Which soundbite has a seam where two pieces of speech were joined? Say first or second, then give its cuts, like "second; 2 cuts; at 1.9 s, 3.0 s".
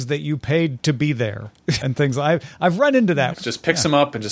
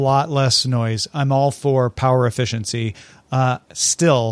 first; 2 cuts; at 1.8 s, 3.3 s